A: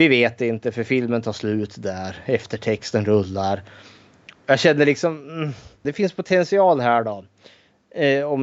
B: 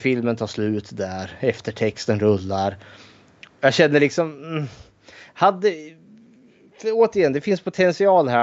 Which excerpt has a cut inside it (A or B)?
A